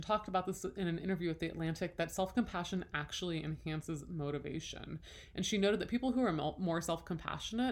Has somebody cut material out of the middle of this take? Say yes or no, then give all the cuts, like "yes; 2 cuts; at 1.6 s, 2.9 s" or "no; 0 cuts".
no; 0 cuts